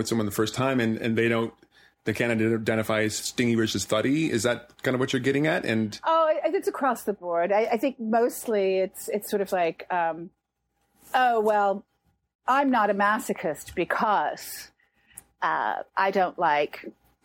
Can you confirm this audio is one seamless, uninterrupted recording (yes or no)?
yes